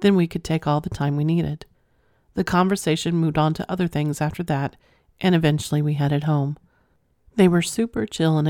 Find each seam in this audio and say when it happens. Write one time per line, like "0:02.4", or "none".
0:07.3